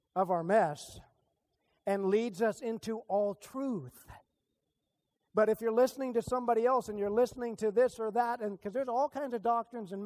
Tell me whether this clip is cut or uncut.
uncut